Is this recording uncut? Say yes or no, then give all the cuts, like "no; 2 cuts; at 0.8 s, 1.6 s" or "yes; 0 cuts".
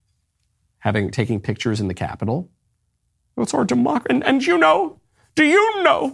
yes; 0 cuts